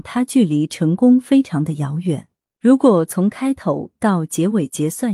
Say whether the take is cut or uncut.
cut